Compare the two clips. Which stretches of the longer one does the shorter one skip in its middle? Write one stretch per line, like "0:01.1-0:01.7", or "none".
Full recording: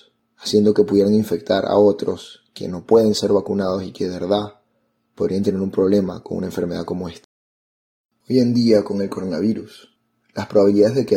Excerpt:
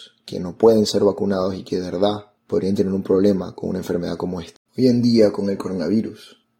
0:04.6-0:05.0
0:07.3-0:08.2